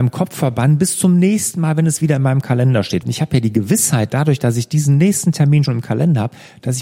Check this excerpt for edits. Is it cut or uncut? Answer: cut